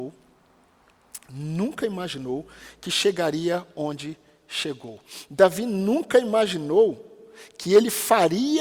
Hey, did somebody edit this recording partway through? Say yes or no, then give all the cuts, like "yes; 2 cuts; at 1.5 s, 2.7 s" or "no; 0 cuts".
no; 0 cuts